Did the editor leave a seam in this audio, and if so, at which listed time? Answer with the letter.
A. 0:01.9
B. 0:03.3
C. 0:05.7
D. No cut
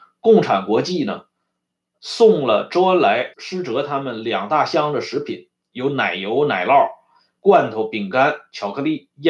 B